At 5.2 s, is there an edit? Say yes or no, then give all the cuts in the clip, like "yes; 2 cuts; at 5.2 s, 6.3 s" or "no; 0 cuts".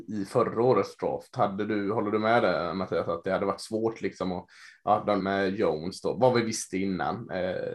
yes; 1 cut; at 5.2 s